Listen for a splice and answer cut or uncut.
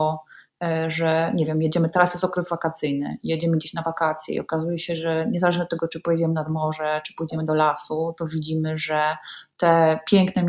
uncut